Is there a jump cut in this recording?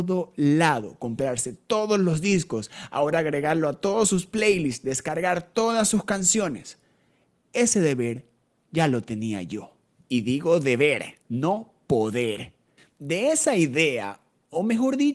yes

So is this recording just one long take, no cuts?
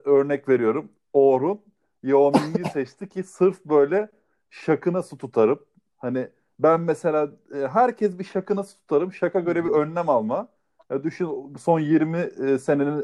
yes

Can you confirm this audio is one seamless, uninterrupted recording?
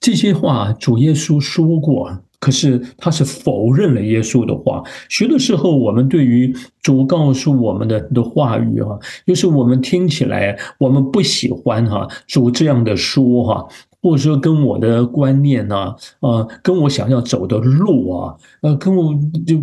yes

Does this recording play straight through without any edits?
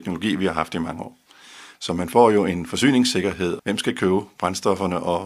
no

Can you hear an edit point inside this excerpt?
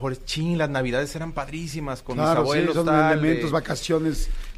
no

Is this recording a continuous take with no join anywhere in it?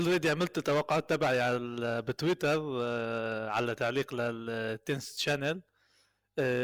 yes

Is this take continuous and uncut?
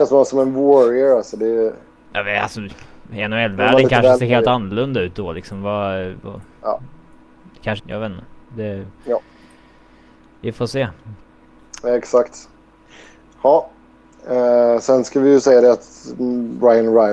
no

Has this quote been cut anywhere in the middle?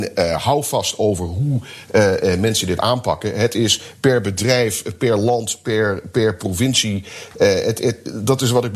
no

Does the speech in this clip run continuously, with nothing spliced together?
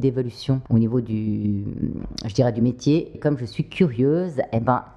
no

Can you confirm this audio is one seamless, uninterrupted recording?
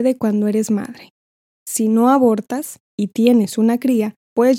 no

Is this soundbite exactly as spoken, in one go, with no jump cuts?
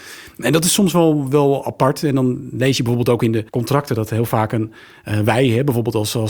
no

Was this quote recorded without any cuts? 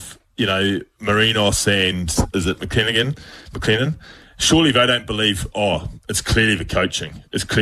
yes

